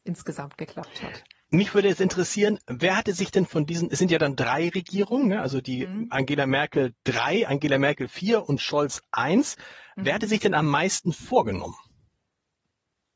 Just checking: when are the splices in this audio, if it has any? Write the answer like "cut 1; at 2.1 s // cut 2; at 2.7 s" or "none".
none